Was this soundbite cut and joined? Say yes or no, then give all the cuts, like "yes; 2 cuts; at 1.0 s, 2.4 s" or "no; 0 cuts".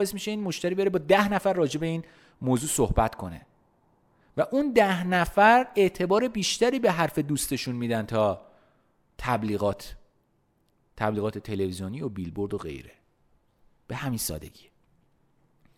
no; 0 cuts